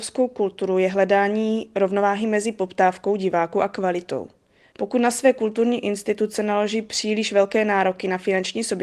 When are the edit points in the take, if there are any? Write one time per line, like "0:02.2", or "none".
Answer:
0:04.6